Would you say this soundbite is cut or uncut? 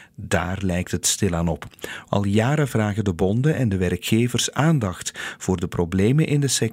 cut